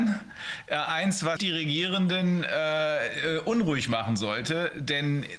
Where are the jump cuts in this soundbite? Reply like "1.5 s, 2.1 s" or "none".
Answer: 1.4 s